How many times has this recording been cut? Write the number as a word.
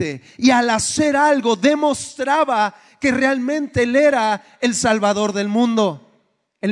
zero